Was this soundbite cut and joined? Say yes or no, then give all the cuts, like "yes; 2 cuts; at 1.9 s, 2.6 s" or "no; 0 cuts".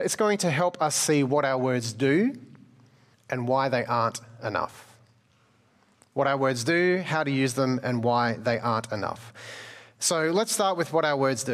yes; 1 cut; at 3.1 s